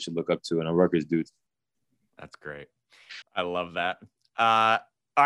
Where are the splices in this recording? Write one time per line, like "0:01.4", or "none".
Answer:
0:03.2